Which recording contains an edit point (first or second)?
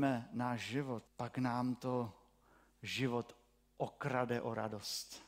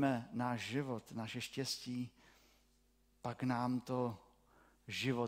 first